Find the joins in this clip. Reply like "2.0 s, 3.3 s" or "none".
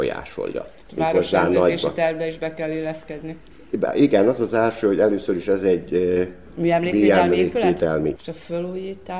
8.2 s